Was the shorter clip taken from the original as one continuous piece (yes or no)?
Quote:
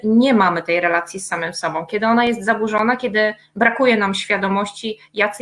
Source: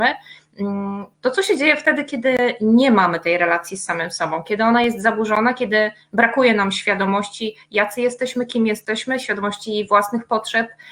yes